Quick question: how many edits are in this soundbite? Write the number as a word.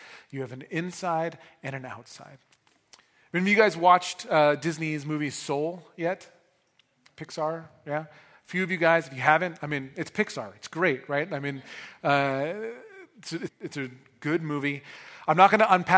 one